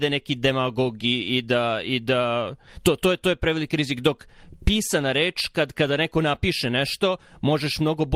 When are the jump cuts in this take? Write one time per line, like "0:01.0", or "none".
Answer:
none